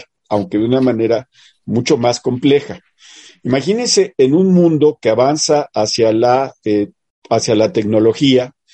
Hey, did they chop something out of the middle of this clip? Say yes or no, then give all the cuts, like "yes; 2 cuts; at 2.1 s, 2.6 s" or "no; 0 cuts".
yes; 1 cut; at 3.3 s